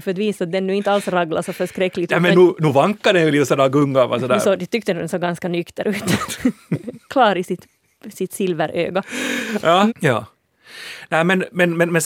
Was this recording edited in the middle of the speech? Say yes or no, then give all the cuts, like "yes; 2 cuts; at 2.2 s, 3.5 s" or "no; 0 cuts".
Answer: yes; 1 cut; at 9.9 s